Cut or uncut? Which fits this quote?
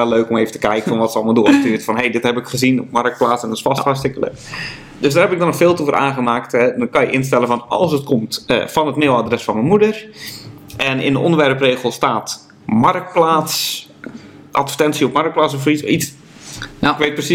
uncut